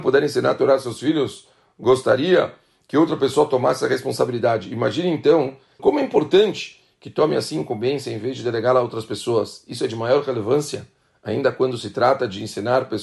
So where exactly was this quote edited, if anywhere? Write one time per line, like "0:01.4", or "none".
0:05.8

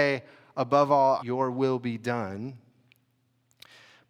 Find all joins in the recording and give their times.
0:01.2

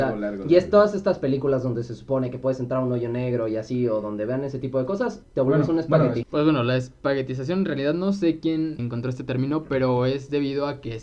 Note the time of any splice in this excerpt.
0:05.2
0:06.2
0:08.8

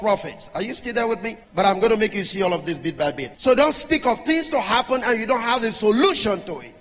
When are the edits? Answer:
0:01.4
0:03.3

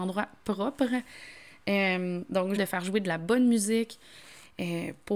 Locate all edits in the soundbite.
0:02.6

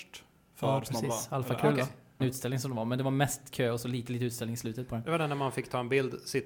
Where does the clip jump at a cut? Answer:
0:02.2

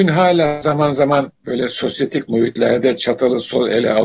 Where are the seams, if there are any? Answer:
0:01.4

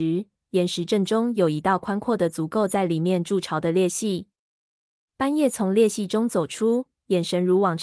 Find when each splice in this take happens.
none

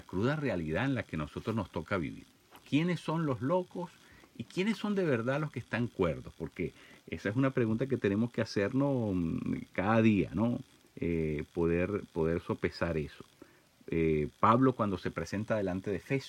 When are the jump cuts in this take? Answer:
none

